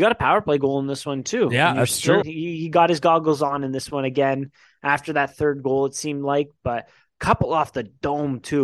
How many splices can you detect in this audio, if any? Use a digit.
1